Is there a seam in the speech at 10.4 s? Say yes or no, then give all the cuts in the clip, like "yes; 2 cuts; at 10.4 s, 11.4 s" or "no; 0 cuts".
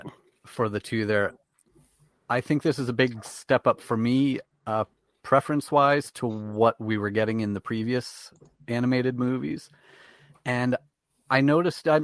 no; 0 cuts